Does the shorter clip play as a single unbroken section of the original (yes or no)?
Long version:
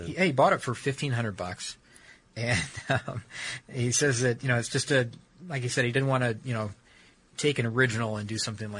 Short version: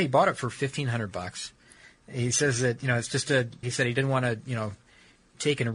no